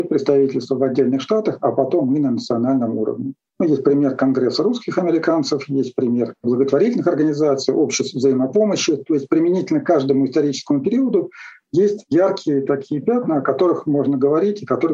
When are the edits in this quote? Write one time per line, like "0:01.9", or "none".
none